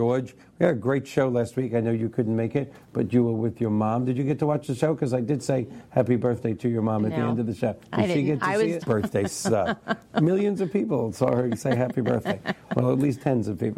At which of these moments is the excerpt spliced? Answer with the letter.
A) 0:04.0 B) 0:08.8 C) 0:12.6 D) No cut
B